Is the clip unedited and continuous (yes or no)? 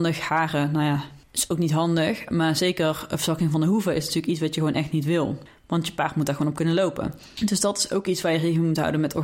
yes